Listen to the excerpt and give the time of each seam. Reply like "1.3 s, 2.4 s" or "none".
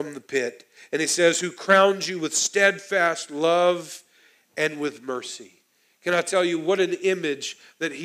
none